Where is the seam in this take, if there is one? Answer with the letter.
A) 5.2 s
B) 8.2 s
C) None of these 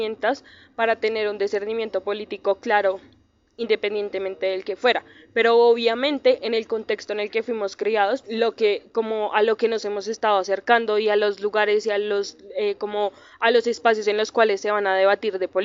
B